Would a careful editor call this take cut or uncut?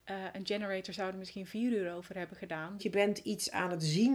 cut